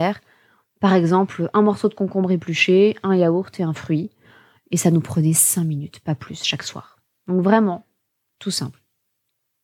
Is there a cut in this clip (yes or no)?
no